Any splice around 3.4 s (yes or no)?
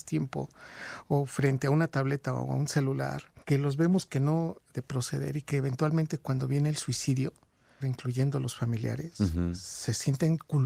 yes